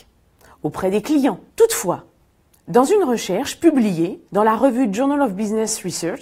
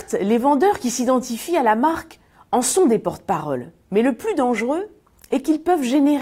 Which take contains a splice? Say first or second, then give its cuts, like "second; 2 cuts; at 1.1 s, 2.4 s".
first; 2 cuts; at 1.5 s, 4.3 s